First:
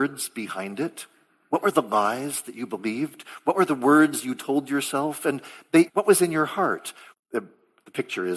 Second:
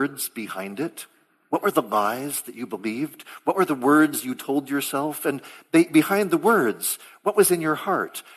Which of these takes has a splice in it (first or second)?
first